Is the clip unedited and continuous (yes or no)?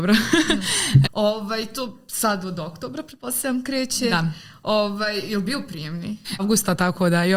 no